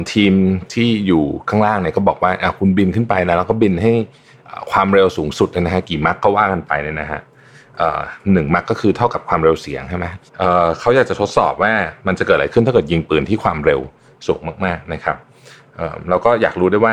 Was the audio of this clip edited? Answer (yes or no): yes